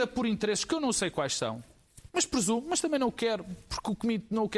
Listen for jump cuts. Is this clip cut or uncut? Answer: uncut